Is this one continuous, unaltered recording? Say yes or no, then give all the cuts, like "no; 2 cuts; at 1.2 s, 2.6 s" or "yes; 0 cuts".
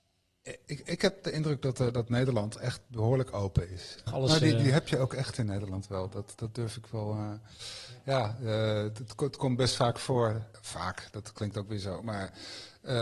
no; 1 cut; at 4.1 s